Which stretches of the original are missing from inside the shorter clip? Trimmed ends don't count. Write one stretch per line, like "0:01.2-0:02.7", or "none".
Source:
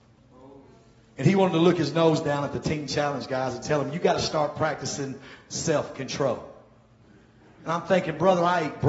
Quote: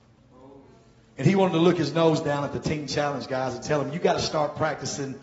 none